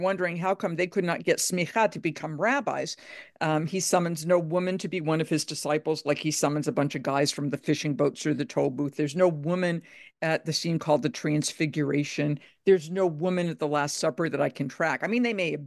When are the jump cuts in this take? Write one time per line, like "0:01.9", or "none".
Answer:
0:03.4